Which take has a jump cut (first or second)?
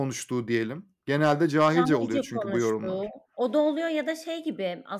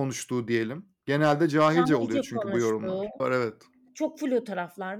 second